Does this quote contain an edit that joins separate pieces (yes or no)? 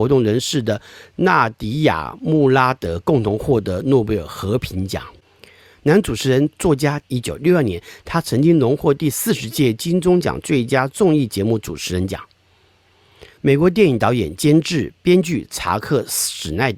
yes